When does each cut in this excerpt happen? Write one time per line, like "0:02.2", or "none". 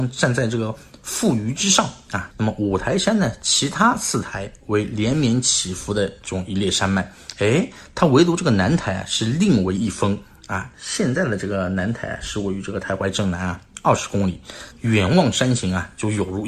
0:02.3
0:10.7
0:14.7